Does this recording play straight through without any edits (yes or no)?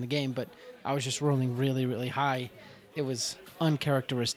no